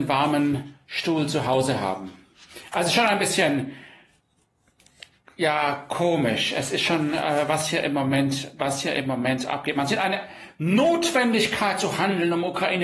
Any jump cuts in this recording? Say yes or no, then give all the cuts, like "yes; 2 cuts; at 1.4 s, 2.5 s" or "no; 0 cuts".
no; 0 cuts